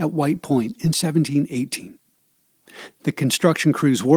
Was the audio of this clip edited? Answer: yes; 1 cut; at 2.9 s

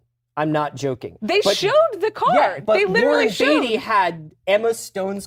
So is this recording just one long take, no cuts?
yes; 0 cuts

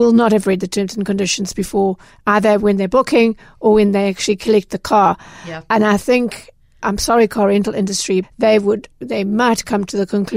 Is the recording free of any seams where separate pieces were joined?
no; 2 cuts; at 6.8 s, 8.2 s

